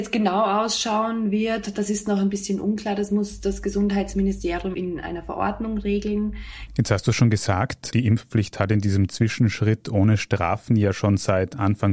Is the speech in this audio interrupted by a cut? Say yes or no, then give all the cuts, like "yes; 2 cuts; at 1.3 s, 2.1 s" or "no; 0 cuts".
yes; 1 cut; at 6.7 s